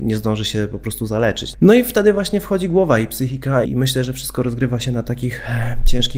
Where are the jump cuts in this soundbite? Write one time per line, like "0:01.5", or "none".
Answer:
0:01.5
0:03.7